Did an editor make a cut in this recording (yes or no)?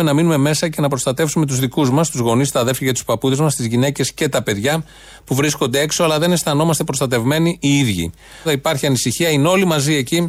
yes